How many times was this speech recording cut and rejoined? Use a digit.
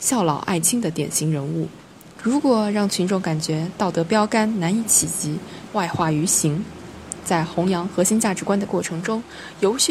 2